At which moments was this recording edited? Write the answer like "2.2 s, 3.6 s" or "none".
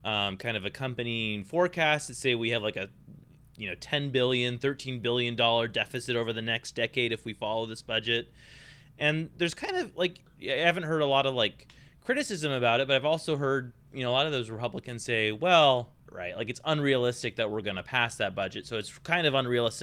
16.1 s